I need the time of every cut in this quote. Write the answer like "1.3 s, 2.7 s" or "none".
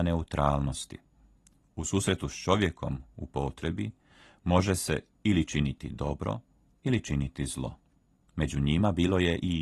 8.2 s